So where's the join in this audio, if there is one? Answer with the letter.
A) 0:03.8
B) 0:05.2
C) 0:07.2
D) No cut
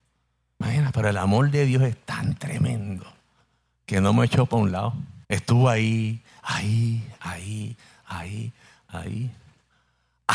B